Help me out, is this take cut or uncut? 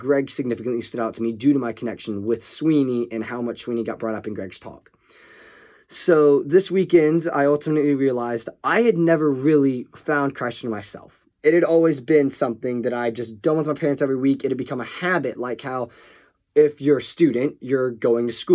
uncut